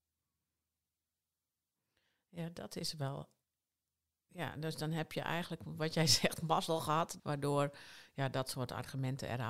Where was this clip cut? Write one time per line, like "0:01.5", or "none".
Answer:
0:07.2